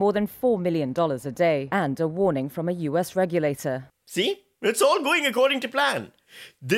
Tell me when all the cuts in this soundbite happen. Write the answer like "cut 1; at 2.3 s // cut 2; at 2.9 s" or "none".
cut 1; at 4.0 s